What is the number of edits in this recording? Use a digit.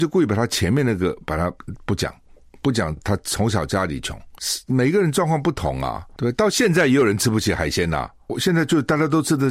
0